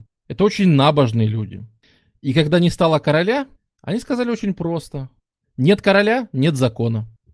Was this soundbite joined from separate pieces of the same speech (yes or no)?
no